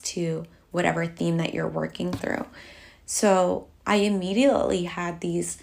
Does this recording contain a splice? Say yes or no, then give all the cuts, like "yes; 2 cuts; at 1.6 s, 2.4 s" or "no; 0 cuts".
yes; 1 cut; at 3.8 s